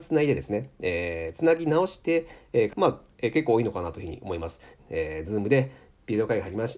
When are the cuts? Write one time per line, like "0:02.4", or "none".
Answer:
0:02.7
0:04.8